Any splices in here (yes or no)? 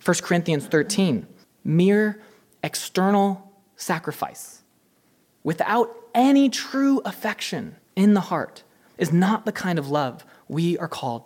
yes